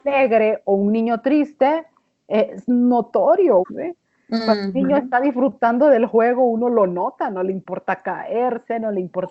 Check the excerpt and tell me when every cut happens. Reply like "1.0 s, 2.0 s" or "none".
3.6 s